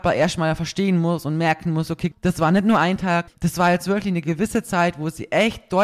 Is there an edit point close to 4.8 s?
no; 2 cuts; at 2.1 s, 3.3 s

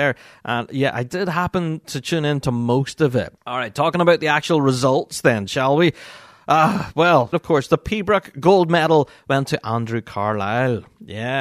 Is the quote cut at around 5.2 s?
no; 2 cuts; at 3.4 s, 7.3 s

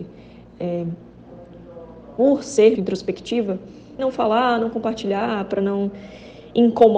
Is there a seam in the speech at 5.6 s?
no; 2 cuts; at 2.8 s, 4.0 s

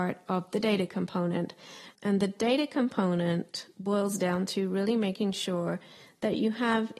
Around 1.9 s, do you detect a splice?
yes; 1 cut; at 1.9 s

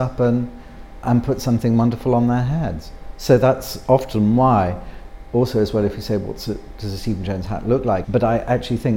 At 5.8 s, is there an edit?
no; 2 cuts; at 1.0 s, 8.0 s

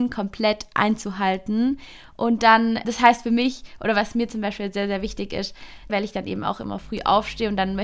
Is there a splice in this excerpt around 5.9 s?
yes; 2 cuts; at 2.8 s, 5.9 s

